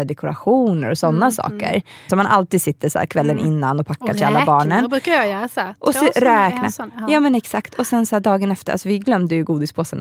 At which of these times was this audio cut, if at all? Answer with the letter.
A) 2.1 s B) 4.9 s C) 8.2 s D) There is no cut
A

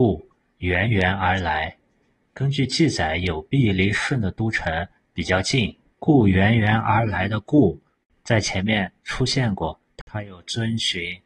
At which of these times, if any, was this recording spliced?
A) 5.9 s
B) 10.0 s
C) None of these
A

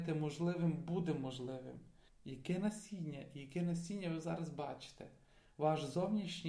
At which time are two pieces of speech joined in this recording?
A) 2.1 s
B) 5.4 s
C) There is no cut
A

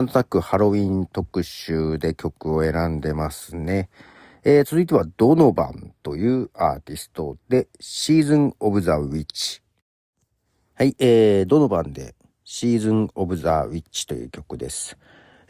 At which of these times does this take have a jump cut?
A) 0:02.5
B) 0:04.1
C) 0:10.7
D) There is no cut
D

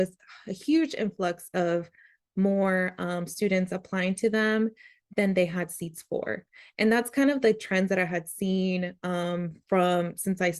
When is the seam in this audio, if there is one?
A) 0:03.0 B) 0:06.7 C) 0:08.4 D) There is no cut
D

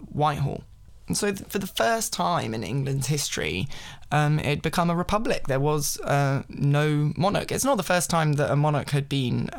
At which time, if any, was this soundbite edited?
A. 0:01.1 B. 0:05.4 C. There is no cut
C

